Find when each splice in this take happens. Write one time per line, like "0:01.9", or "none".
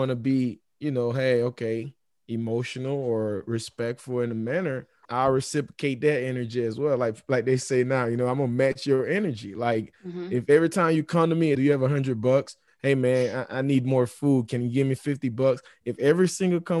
0:05.0
0:11.5
0:12.7